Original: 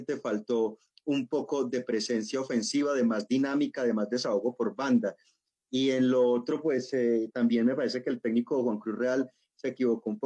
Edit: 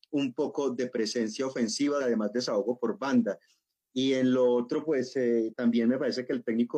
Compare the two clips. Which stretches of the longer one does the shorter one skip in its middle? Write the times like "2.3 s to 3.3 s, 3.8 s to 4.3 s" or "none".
2.9 s to 3.8 s